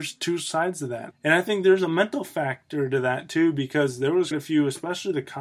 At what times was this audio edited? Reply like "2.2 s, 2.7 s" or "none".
1.1 s, 4.3 s